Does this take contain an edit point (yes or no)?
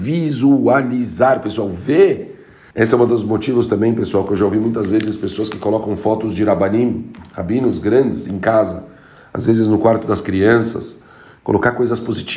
yes